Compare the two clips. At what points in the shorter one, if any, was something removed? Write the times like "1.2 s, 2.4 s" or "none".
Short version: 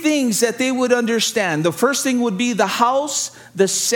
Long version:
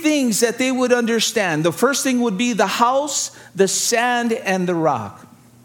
none